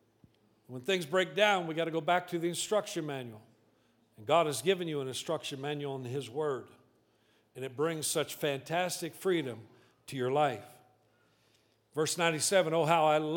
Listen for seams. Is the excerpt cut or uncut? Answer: uncut